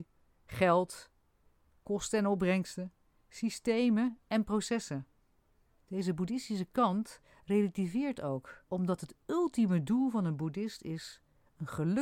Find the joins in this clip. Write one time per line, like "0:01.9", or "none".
0:05.8
0:08.7

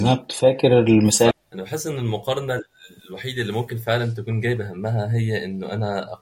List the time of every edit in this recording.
0:01.3

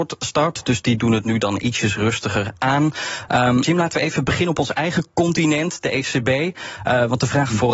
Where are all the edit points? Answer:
0:03.6

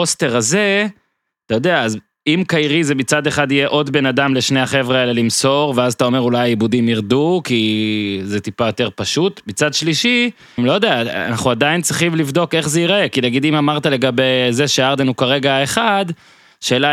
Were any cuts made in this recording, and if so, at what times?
0:10.6

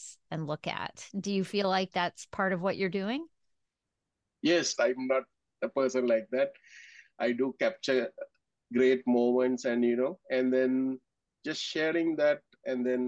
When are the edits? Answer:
0:04.7

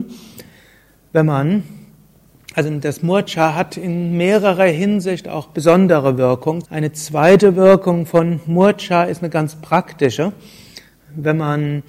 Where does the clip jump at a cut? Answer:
0:06.6

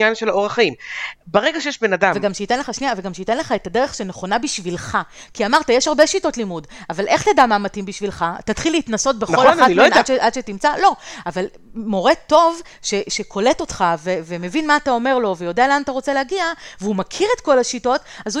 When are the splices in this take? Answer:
none

